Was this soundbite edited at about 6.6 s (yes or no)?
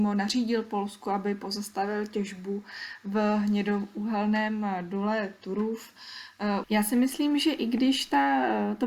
yes